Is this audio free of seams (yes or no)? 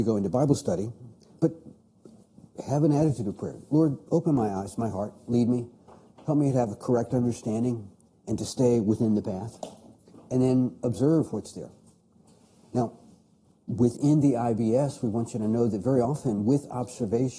yes